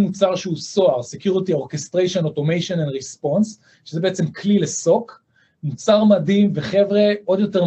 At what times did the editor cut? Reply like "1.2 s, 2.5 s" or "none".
none